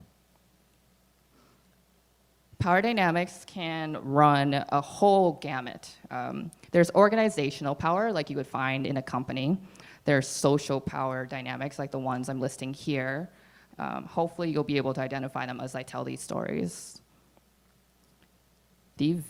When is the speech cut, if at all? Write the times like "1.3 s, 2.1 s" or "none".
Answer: 13.7 s

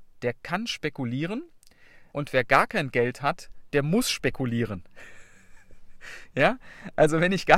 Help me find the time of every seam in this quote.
2.1 s

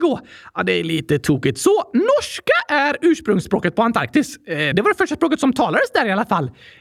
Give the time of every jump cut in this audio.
4.7 s

